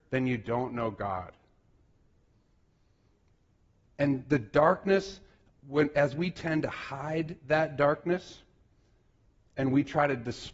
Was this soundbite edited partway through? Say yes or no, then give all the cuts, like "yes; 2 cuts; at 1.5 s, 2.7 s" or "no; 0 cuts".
yes; 1 cut; at 5.5 s